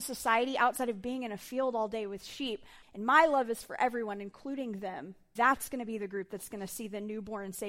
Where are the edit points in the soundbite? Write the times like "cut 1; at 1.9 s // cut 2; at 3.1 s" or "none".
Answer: cut 1; at 2.8 s // cut 2; at 5.4 s